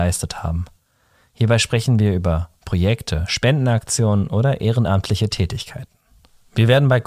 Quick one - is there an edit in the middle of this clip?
no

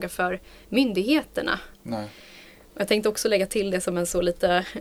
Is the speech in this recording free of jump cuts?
no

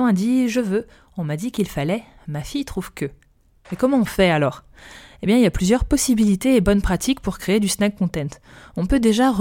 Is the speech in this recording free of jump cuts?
no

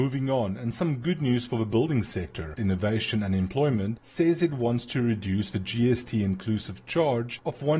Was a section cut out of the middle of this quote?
yes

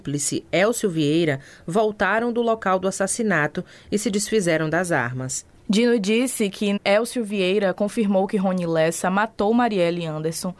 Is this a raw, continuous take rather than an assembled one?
no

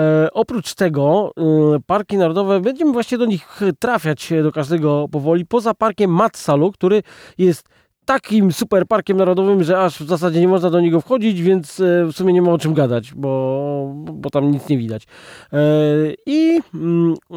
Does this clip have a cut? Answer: no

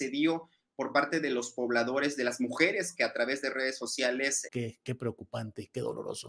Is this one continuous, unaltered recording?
no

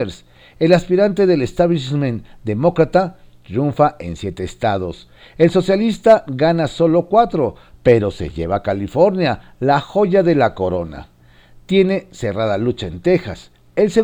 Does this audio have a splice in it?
no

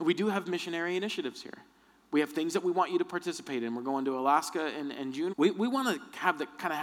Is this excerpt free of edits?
no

